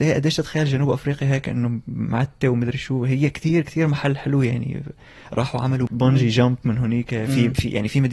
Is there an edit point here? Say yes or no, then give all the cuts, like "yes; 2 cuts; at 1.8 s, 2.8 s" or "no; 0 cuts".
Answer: no; 0 cuts